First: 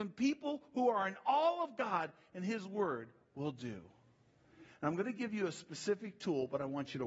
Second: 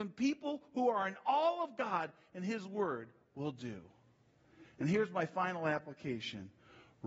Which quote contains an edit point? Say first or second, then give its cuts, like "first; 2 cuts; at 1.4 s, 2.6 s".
first; 1 cut; at 4.7 s